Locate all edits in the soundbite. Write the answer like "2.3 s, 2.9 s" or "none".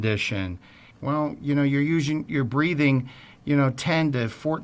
0.9 s